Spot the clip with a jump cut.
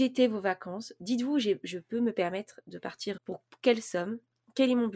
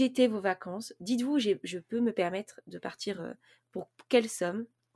first; 1 cut; at 3.2 s

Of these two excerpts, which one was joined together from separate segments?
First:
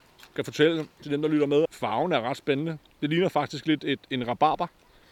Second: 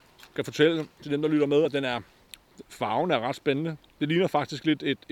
first; 1 cut; at 1.7 s

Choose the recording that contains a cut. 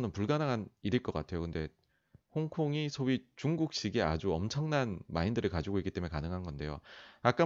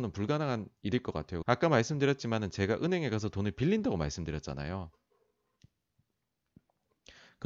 second; 1 cut; at 1.4 s

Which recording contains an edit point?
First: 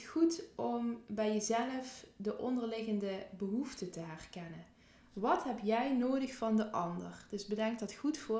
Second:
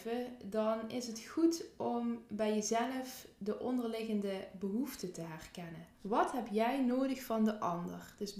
second; 1 cut; at 5.9 s

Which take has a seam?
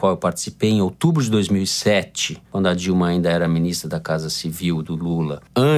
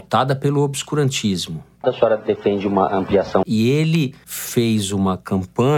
second; 2 cuts; at 1.8 s, 3.4 s

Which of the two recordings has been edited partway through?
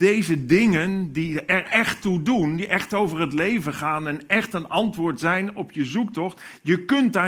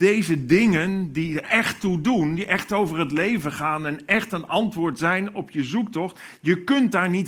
second; 1 cut; at 1.4 s

